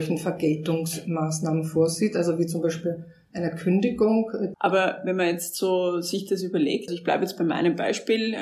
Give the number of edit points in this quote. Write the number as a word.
two